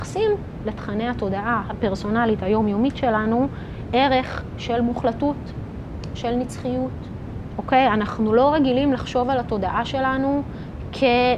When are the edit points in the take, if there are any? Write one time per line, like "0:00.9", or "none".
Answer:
0:07.5

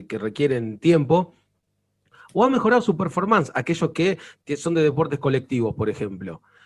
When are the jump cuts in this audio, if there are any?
none

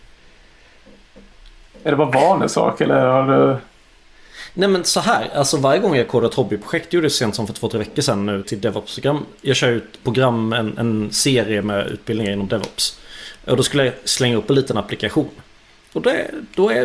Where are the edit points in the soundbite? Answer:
0:08.4

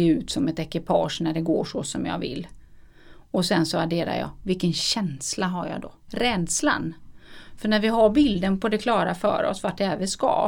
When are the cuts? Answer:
0:06.1

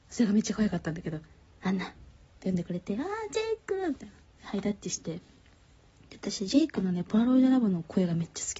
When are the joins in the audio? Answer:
none

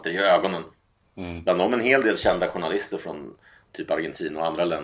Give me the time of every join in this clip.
0:01.0

